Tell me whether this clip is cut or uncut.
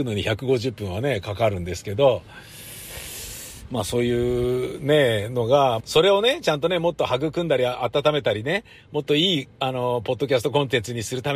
cut